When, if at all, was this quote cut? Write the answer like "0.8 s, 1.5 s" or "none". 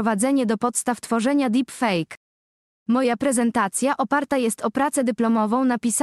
none